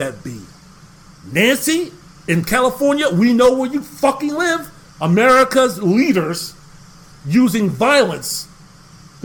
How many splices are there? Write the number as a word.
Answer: two